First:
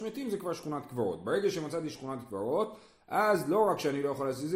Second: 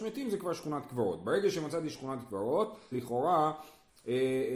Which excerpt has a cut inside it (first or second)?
second